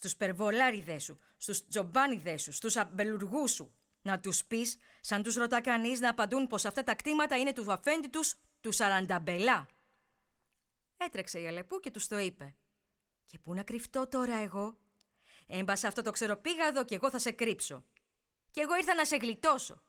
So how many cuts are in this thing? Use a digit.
1